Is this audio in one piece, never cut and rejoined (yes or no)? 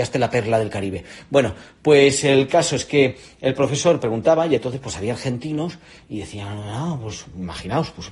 yes